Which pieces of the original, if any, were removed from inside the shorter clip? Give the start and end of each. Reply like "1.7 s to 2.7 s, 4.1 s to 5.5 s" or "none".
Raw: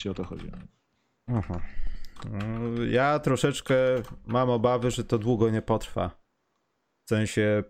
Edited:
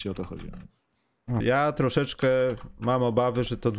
1.4 s to 2.9 s